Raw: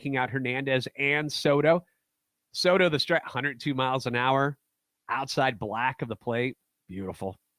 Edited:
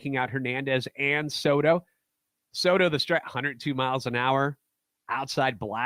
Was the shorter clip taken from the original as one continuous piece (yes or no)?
yes